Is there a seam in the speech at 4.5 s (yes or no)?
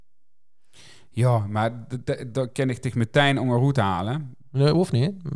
no